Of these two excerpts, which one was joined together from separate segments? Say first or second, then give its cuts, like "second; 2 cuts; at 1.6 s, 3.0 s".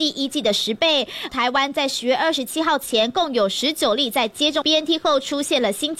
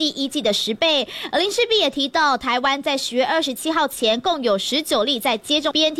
first; 1 cut; at 1.3 s